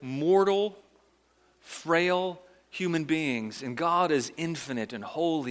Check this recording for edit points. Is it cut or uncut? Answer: uncut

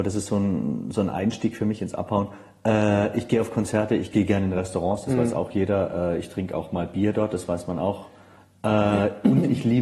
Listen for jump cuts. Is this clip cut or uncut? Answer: uncut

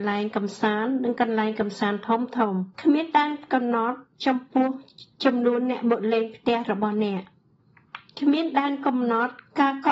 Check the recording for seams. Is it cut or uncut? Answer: cut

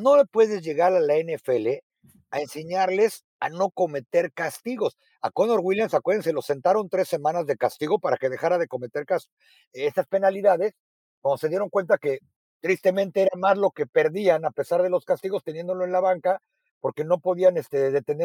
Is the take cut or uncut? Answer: uncut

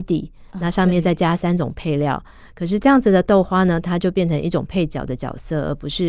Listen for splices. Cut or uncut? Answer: uncut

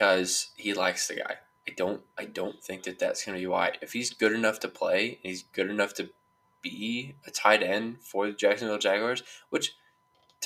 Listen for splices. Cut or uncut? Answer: uncut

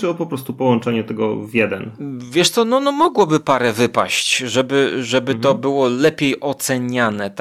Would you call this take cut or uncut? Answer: uncut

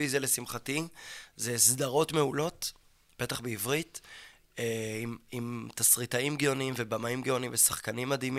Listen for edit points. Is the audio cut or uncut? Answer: uncut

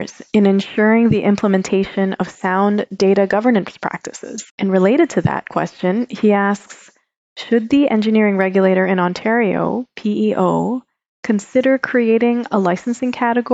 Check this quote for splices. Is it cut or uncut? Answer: cut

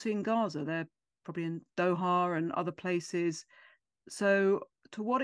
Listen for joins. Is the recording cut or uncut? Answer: uncut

